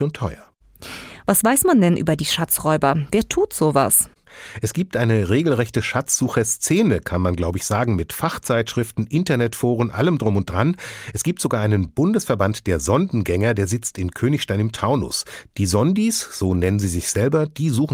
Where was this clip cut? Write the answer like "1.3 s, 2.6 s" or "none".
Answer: none